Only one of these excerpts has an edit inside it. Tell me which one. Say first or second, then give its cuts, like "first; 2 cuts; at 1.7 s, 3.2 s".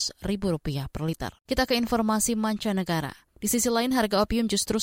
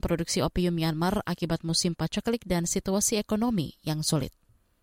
first; 2 cuts; at 1.4 s, 3.3 s